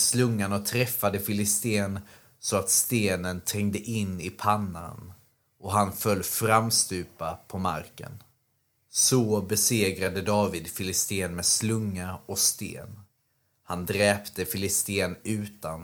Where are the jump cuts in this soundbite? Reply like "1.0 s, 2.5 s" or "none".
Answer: none